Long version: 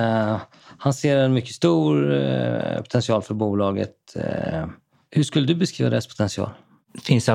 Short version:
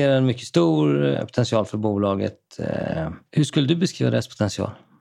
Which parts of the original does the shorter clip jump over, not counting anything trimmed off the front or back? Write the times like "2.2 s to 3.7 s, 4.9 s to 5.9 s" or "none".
2.2 s to 2.7 s, 4.8 s to 5.0 s